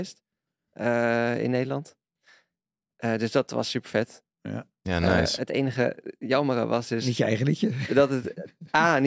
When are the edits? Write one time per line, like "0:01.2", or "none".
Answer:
none